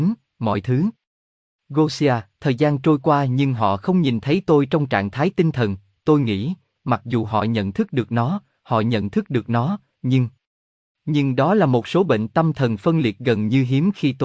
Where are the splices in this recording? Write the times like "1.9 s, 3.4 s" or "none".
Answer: 6.8 s

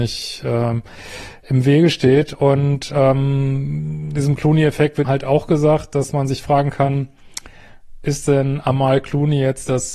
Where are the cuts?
5.0 s

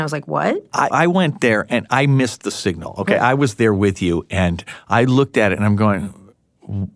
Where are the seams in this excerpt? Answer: 0.9 s

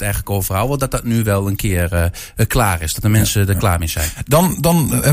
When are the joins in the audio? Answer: none

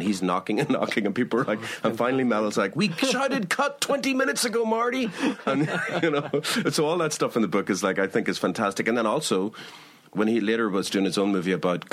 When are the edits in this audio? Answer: none

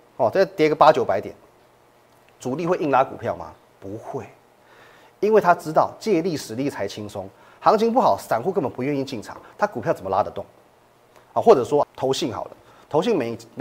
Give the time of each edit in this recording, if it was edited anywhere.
11.8 s

